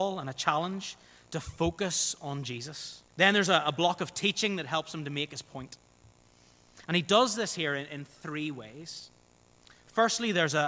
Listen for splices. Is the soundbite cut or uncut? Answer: cut